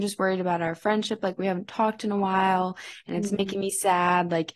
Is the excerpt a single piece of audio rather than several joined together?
yes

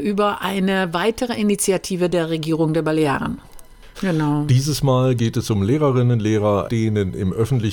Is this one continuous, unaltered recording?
no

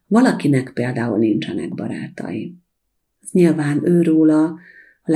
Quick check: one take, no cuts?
yes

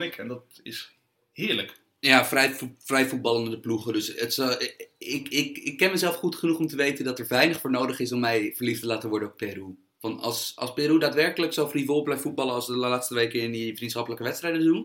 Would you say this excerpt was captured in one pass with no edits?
yes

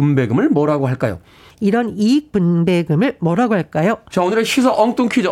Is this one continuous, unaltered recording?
no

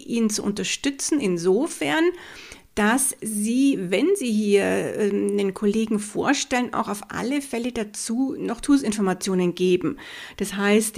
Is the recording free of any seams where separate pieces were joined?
yes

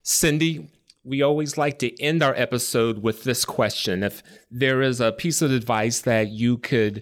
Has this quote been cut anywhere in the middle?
no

